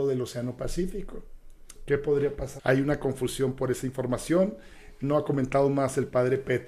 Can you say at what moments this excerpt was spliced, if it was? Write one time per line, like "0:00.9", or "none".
0:02.6